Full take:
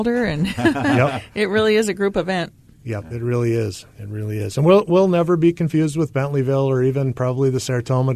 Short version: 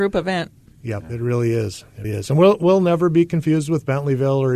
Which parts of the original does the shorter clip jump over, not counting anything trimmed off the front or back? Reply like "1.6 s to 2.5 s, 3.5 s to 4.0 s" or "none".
4.1 s to 4.3 s

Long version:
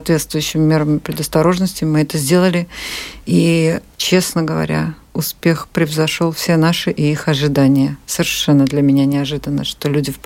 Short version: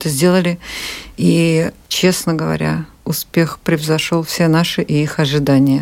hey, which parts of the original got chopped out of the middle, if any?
none

